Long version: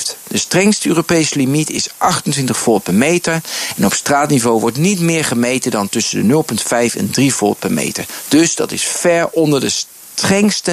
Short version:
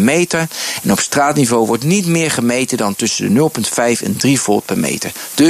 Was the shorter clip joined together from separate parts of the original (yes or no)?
no